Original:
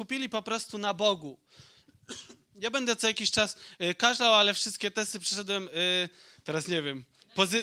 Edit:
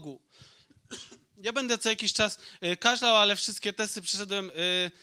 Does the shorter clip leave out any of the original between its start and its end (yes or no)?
no